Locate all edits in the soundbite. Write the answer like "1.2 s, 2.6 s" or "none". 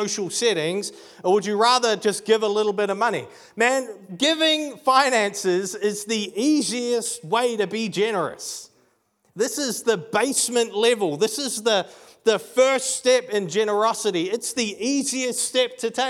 none